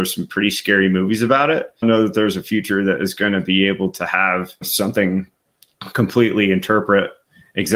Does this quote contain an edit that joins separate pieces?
no; 0 cuts

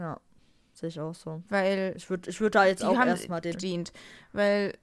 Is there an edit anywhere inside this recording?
yes; 1 cut; at 3.5 s

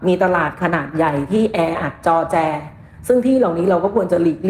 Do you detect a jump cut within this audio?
no; 0 cuts

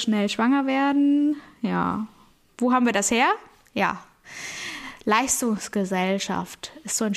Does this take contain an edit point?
no; 0 cuts

